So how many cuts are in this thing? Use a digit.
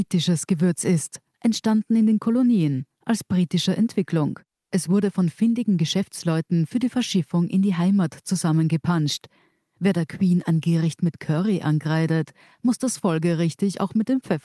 1